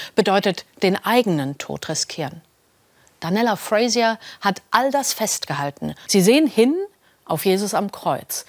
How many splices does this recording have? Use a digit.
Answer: 1